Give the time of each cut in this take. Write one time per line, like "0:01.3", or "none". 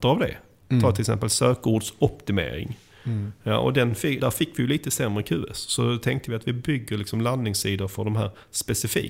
0:04.2